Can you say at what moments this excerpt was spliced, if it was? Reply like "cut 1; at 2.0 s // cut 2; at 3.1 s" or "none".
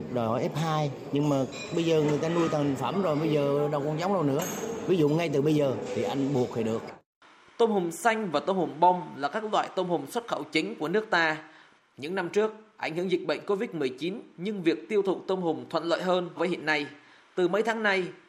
cut 1; at 11.8 s // cut 2; at 16.4 s